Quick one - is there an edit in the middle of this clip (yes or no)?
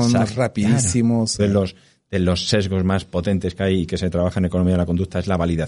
yes